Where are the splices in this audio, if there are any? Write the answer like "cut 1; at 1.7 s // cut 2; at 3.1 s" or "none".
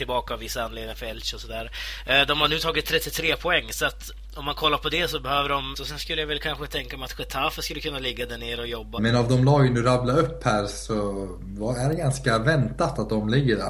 cut 1; at 5.7 s // cut 2; at 9.0 s